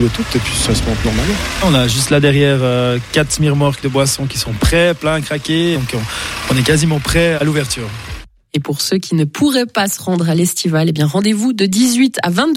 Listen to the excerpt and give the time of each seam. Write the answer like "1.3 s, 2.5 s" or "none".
5.7 s, 7.4 s